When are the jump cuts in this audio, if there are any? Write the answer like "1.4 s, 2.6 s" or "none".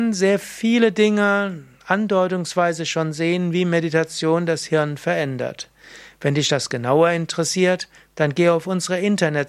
none